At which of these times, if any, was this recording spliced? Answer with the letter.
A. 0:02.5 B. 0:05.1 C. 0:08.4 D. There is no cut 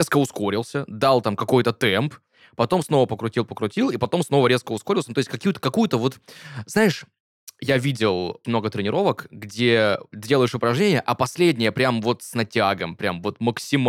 C